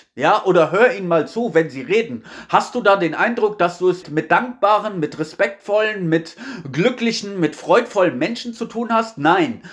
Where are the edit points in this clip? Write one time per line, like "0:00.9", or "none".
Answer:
0:04.0